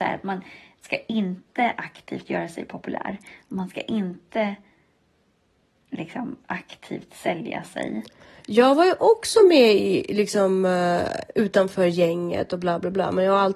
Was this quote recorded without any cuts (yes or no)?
yes